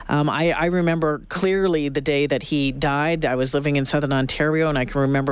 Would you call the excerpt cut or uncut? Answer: uncut